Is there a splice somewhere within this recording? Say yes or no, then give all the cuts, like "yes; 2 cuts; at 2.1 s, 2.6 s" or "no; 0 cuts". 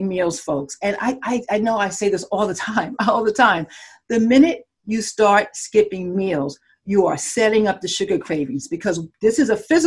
no; 0 cuts